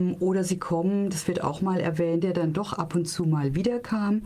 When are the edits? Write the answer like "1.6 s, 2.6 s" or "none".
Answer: 2.2 s